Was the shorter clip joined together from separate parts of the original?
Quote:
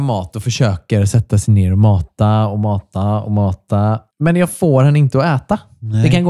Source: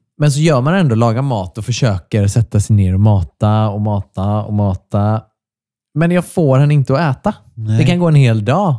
yes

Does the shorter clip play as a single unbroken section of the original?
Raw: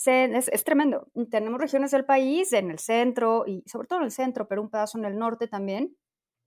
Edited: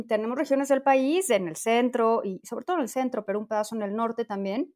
yes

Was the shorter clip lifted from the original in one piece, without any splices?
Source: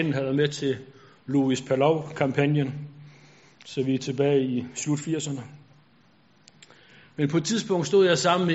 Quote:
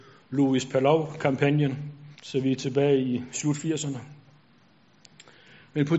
no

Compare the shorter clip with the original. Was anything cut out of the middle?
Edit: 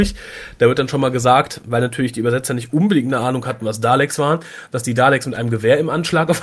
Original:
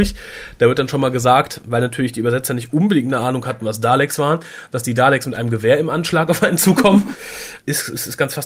no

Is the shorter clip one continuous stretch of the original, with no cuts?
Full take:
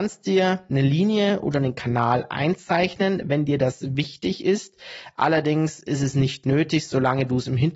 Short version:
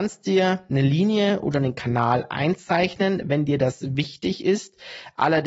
yes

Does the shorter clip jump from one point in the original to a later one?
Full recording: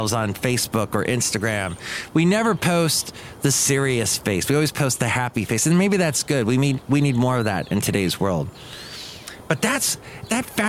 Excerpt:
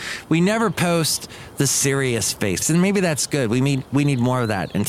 yes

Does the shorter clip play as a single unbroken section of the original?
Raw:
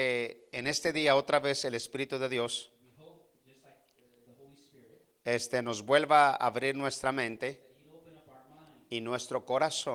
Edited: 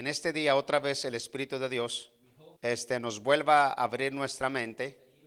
no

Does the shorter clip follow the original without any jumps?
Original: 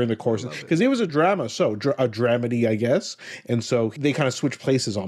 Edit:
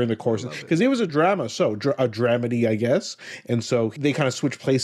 yes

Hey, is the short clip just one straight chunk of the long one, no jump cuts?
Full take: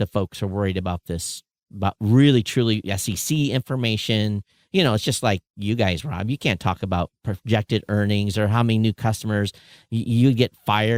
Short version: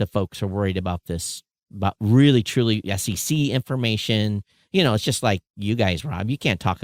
yes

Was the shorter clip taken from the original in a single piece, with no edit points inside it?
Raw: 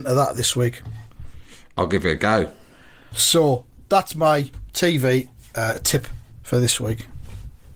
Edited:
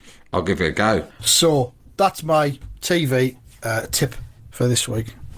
no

